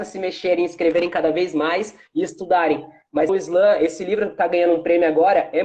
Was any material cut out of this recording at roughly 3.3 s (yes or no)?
yes